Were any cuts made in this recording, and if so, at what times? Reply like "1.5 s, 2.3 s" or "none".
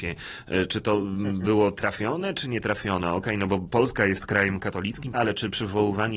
5.1 s